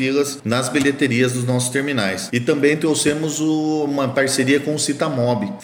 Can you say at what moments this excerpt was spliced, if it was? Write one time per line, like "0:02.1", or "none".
none